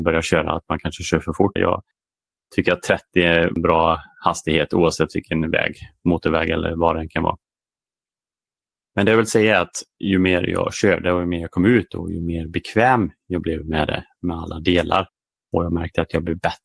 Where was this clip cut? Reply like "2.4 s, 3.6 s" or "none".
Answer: 1.6 s